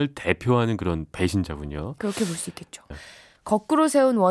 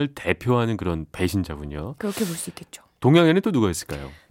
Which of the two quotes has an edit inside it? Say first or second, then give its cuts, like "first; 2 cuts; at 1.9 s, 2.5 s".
first; 1 cut; at 2.9 s